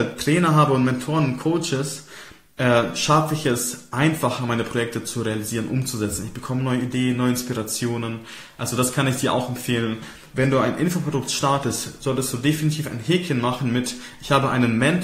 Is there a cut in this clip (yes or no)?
no